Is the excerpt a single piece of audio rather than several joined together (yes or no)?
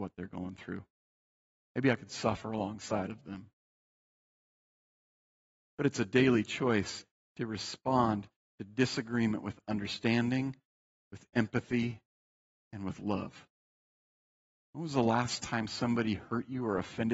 no